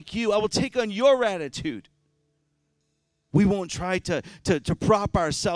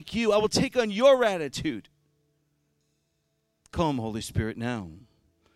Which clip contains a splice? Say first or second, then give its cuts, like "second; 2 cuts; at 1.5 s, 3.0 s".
first; 1 cut; at 3.3 s